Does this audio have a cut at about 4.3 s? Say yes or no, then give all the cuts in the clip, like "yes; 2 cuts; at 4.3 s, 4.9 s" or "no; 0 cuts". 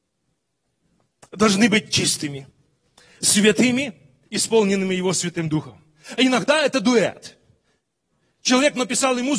yes; 2 cuts; at 4.3 s, 6.0 s